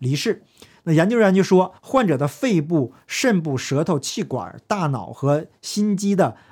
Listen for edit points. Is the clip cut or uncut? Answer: cut